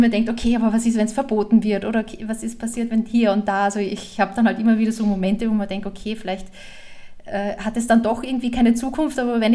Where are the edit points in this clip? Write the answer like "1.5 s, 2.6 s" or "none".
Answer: none